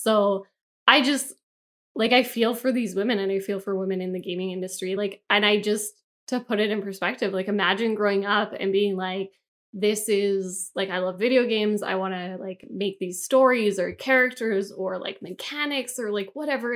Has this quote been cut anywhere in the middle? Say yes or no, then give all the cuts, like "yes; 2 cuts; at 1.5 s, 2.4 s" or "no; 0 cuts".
no; 0 cuts